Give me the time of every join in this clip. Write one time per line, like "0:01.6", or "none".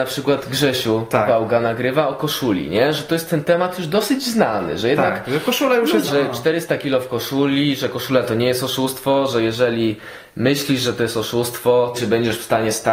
0:06.1
0:11.9